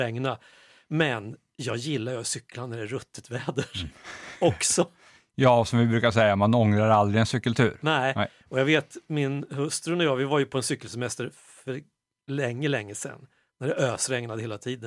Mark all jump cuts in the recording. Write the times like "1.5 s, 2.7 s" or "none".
none